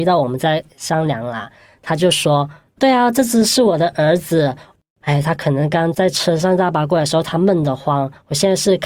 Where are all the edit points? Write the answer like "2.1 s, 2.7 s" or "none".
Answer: none